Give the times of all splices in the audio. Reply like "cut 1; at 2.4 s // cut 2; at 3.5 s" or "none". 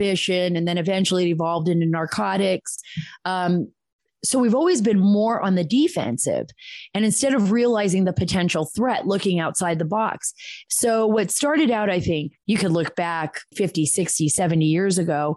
cut 1; at 10.7 s // cut 2; at 12.4 s // cut 3; at 13.5 s